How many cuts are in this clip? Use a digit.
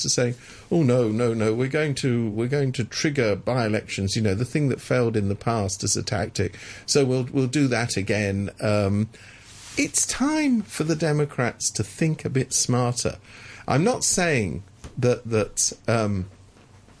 0